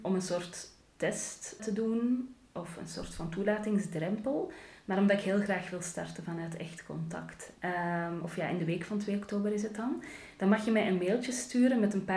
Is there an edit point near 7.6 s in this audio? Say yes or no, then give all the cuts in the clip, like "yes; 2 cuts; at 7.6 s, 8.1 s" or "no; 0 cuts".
yes; 2 cuts; at 1.6 s, 7.6 s